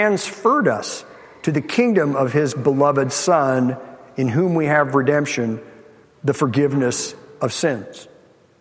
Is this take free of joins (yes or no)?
yes